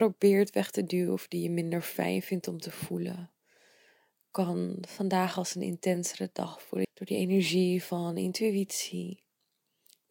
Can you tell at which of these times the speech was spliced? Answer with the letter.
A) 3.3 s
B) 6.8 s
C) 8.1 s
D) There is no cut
B